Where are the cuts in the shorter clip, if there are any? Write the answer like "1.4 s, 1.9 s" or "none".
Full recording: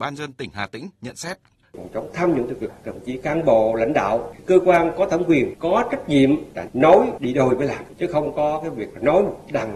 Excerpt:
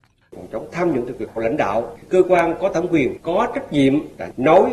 1.4 s

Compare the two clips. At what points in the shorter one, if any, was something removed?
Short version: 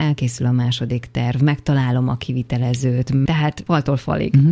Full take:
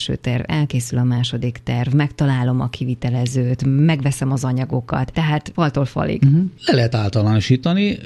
3.3 s

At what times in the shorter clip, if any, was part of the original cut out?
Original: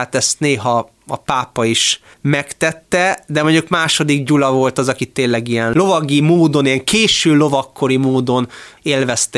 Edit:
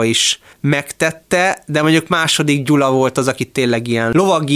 none

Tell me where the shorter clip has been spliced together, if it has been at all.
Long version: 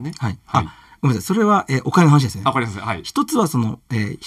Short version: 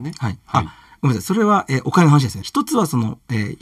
2.4 s

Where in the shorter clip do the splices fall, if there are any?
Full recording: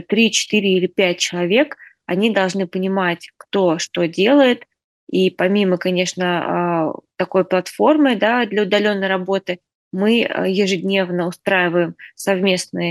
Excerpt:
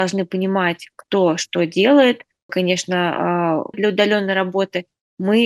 2.5 s, 3.7 s

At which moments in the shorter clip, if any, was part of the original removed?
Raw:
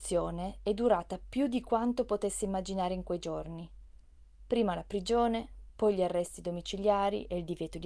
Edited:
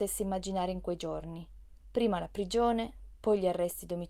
1.8 s

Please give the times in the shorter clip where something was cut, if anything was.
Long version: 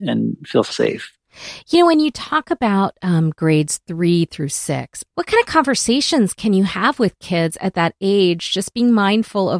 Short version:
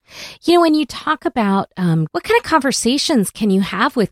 2.1 s

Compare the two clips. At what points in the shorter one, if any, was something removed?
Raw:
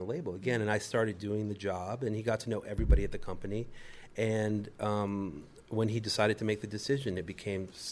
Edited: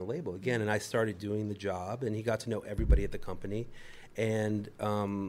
none

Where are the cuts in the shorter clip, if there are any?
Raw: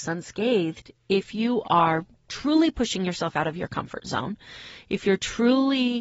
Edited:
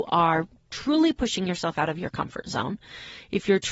none

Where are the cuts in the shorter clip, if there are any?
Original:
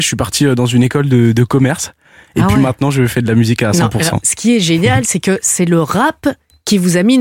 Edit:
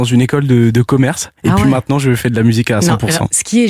1.4 s

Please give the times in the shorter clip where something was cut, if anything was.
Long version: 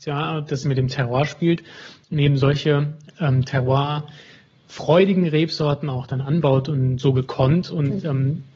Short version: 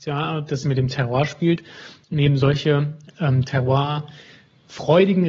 none

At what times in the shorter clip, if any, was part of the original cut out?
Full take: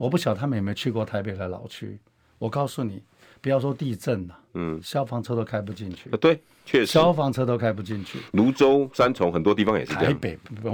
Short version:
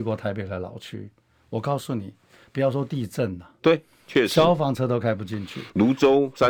3.6 s

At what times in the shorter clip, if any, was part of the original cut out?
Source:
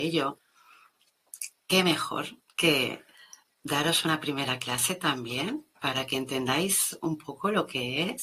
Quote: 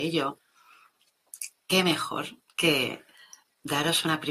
none

